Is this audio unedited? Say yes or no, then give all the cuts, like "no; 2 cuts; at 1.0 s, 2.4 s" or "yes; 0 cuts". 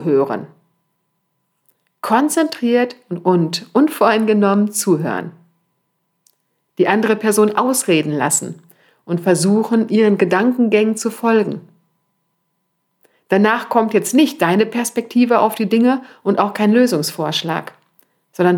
yes; 0 cuts